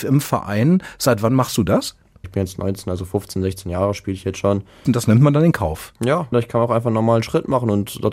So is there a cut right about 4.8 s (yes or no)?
yes